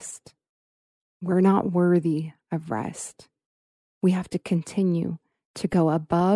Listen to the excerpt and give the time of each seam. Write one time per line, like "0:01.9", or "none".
none